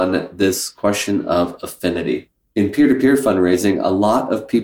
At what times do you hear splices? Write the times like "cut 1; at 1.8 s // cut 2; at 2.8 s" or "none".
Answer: cut 1; at 2.5 s